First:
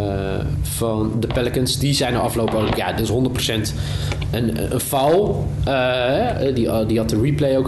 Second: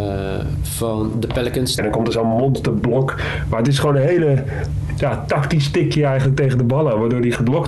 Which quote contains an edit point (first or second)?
second